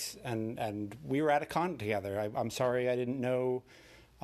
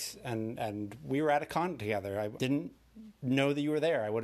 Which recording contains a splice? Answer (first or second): second